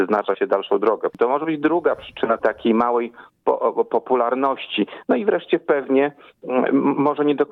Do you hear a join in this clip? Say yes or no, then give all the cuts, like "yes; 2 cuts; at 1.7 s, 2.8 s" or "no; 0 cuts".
yes; 1 cut; at 2.4 s